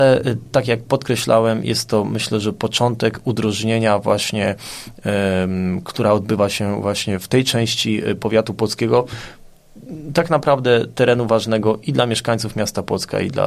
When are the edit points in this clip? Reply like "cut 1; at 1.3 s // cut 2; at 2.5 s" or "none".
cut 1; at 5.8 s